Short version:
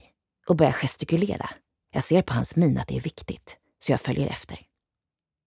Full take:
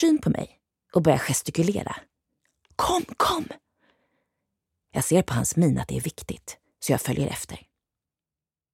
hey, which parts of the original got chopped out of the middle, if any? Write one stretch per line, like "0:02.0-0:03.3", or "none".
0:02.2-0:04.8